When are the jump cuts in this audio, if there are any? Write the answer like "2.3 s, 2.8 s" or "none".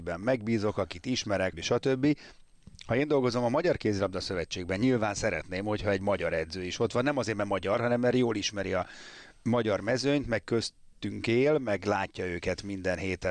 1.5 s

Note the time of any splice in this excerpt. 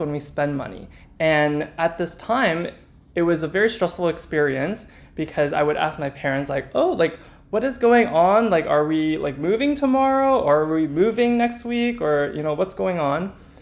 1.0 s

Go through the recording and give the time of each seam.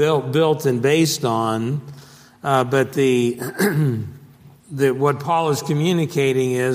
4.6 s

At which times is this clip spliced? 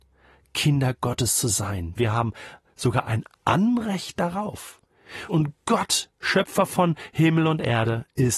2.0 s, 5.3 s

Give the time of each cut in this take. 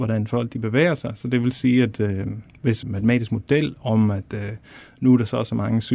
2.8 s

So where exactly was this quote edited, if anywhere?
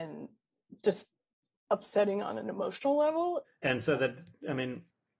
3.4 s

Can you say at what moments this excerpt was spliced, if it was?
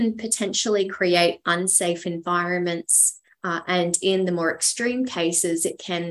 3.2 s

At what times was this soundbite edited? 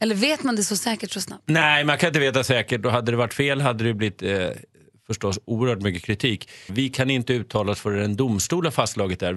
6.7 s

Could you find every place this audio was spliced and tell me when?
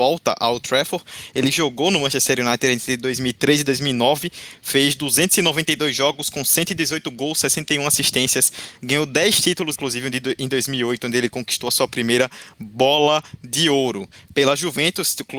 9.7 s

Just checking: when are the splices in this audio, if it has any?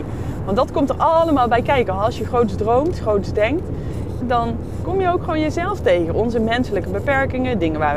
4.2 s

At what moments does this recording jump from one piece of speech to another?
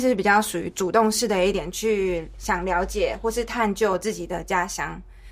none

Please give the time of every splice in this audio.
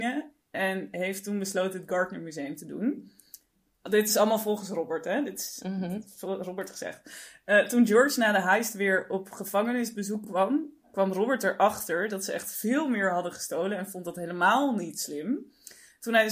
none

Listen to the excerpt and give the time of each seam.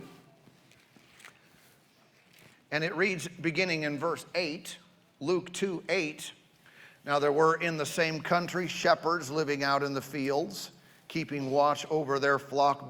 2.5 s

